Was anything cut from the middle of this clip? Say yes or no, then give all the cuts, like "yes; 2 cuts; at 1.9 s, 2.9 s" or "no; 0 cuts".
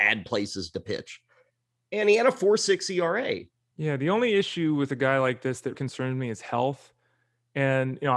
yes; 2 cuts; at 3.7 s, 5.7 s